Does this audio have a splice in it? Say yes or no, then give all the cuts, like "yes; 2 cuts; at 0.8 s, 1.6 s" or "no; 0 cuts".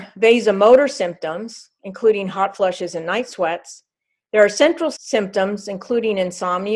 no; 0 cuts